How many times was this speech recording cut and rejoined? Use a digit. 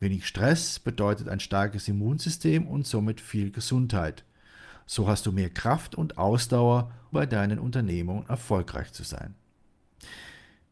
1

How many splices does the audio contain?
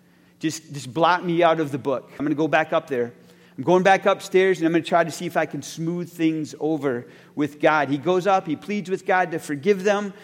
1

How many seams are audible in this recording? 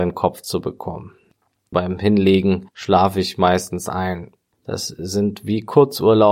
2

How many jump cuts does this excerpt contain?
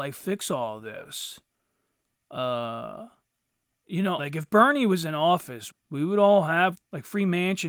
3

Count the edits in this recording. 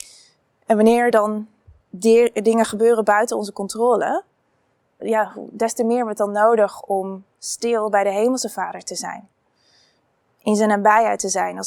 2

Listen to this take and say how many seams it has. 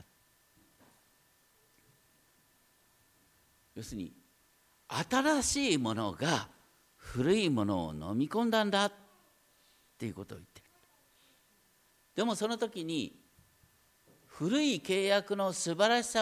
0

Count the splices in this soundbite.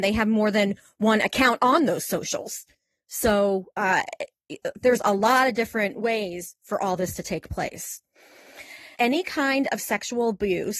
1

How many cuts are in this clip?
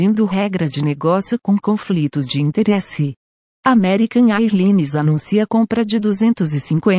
1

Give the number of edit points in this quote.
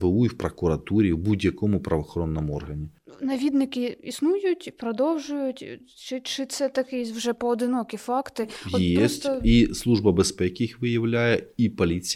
0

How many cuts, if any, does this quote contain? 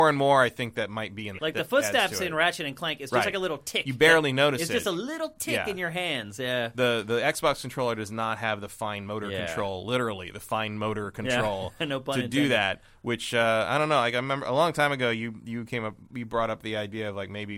1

